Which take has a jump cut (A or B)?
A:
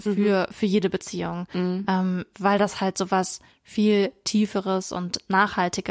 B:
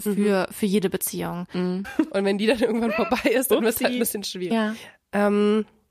B